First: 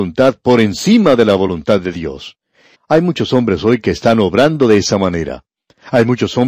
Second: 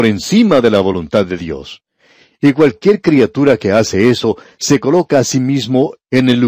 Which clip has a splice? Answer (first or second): first